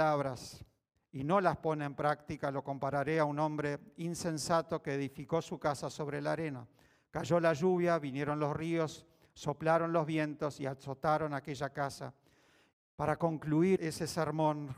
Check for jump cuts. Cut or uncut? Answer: cut